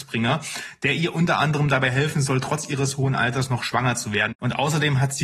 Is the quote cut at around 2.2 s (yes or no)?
no